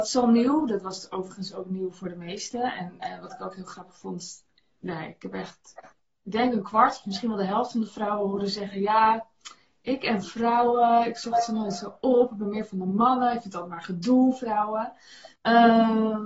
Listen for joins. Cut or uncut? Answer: cut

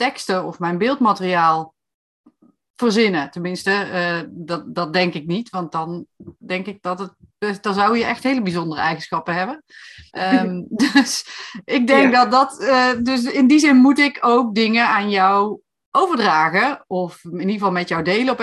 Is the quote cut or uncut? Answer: cut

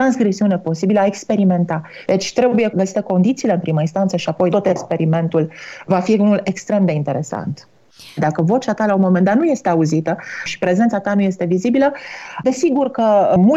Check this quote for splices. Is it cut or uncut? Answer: cut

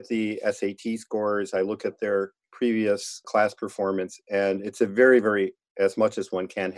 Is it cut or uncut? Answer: uncut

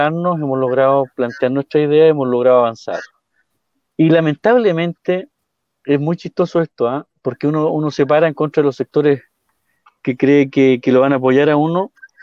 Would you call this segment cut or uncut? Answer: uncut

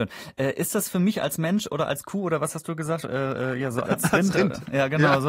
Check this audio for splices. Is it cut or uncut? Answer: cut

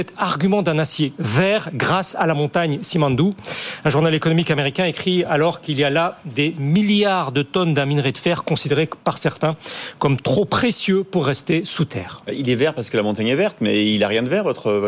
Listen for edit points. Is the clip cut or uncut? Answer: uncut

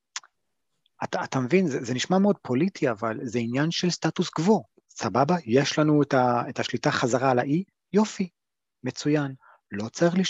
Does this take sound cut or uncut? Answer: cut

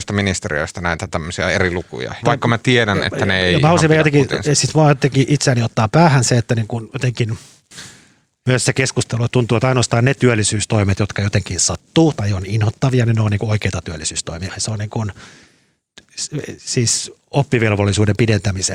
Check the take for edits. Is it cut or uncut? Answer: cut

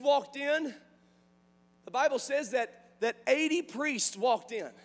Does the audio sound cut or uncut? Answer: uncut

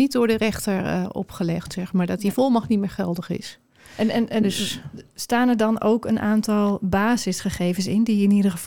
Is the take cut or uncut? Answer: uncut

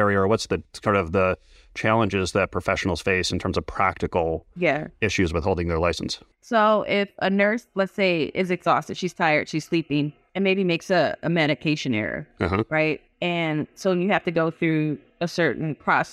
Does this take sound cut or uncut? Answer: uncut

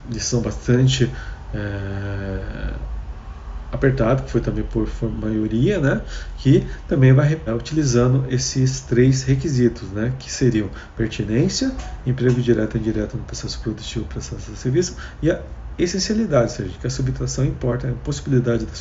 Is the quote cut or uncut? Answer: cut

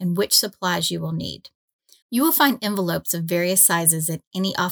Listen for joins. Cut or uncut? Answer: cut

